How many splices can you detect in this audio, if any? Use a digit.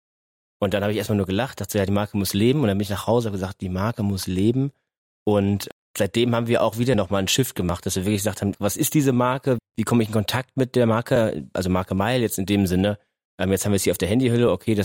2